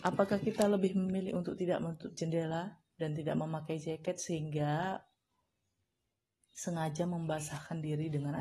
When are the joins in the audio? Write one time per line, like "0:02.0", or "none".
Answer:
none